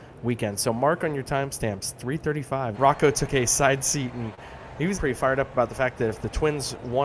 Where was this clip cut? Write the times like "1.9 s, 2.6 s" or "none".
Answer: 2.7 s, 4.9 s